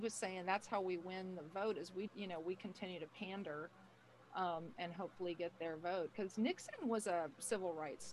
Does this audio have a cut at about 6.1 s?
no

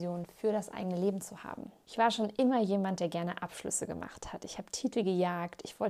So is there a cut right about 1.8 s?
yes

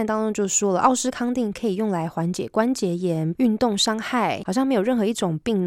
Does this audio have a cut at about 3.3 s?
yes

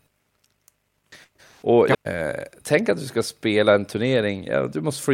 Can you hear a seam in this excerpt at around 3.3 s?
no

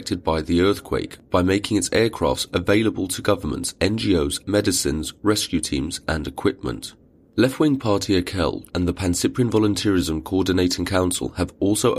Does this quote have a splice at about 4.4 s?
yes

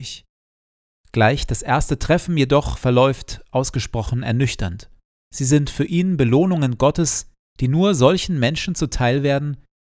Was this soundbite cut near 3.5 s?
no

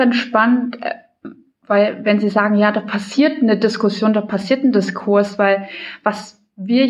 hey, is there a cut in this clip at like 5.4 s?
no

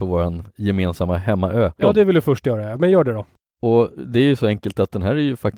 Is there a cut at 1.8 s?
yes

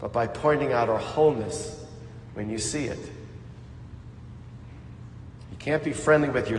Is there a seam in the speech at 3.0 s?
no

